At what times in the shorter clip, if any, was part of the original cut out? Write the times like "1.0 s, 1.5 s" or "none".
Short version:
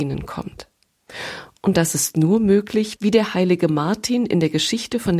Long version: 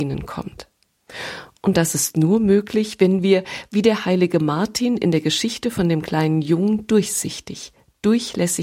3.0 s

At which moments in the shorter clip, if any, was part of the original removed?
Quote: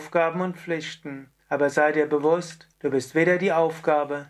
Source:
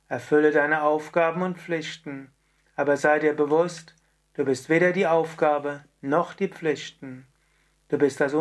1.4 s, 2.7 s

